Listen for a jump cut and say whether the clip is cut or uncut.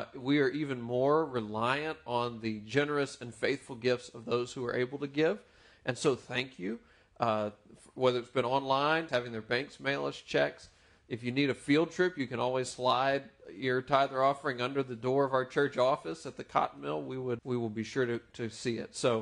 cut